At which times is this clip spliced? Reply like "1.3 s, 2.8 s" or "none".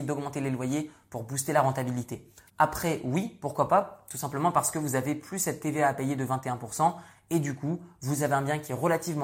2.5 s